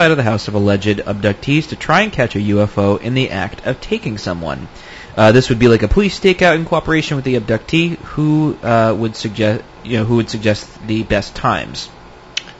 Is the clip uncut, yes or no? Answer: yes